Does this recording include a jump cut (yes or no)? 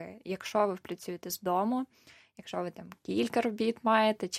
no